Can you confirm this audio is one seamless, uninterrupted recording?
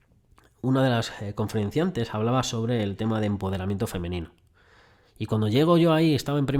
yes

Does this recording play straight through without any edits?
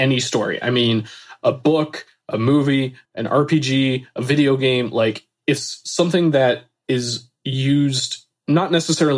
no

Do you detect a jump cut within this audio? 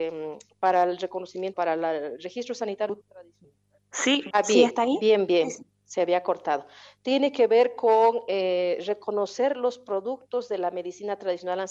yes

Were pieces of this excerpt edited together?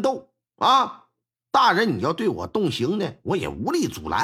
no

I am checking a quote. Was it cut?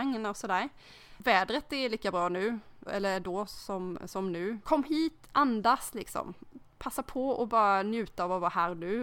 yes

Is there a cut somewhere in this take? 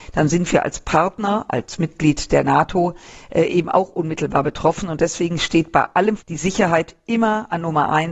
yes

